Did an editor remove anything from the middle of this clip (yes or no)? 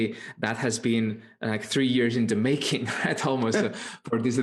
no